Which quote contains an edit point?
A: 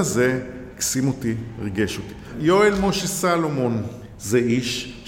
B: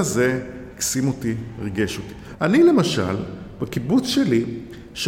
B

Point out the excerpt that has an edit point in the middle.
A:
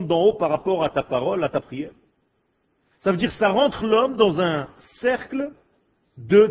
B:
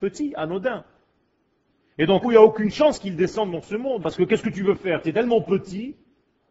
B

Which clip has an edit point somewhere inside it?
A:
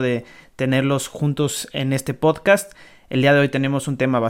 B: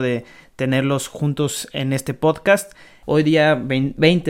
B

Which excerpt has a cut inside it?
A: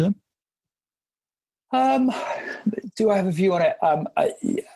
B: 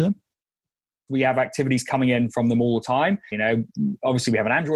B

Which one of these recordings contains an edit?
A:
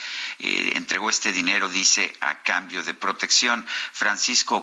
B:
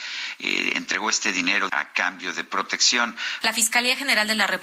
B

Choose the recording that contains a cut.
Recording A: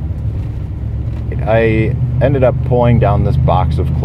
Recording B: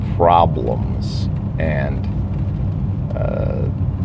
A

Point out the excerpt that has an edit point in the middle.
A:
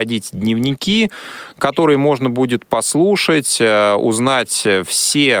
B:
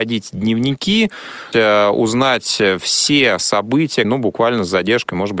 B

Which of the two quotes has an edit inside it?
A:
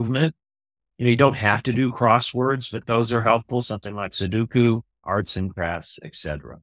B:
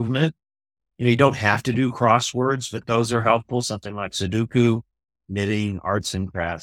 A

